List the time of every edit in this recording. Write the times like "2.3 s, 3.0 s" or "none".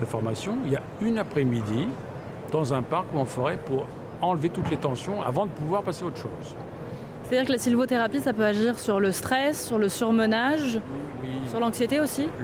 7.2 s